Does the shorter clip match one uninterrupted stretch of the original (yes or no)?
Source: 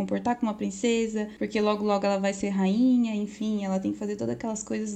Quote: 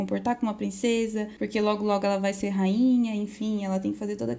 yes